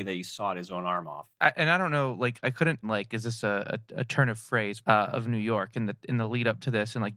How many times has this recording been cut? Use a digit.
2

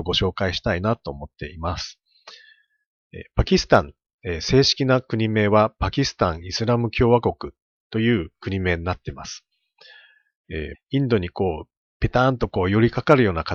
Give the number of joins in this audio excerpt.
1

